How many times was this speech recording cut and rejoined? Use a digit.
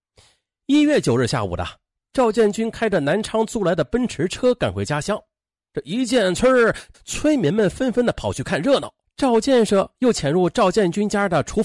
2